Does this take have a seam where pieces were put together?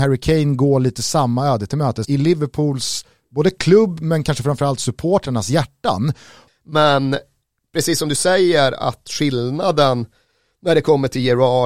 yes; 2 cuts; at 2.0 s, 6.5 s

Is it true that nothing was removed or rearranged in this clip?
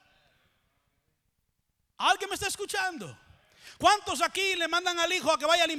yes; 0 cuts

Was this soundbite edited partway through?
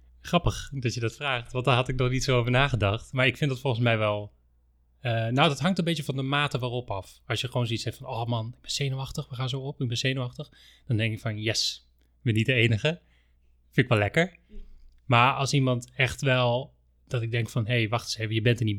no; 0 cuts

